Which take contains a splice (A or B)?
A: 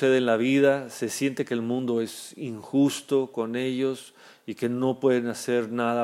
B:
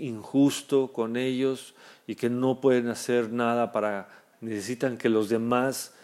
B